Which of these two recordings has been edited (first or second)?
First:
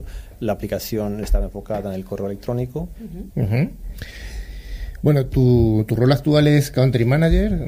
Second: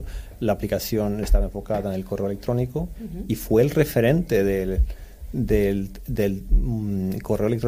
first